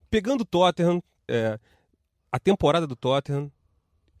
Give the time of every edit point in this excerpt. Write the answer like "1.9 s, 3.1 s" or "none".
1.3 s